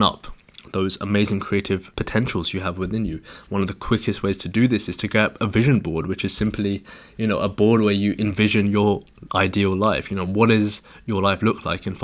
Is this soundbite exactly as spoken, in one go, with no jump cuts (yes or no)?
yes